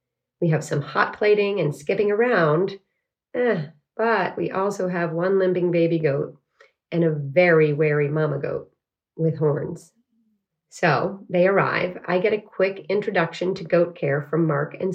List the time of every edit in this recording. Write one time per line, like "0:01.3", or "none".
0:10.5